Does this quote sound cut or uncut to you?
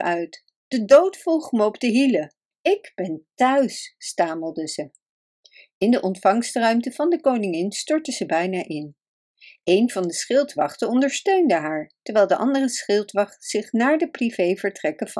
cut